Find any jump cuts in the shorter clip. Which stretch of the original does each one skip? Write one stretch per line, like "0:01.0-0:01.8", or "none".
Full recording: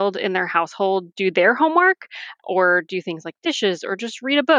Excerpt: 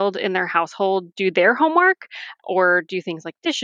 none